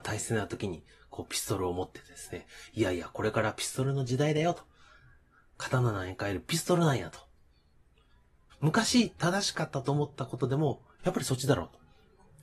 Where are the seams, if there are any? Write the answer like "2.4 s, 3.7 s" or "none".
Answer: 8.5 s, 11.0 s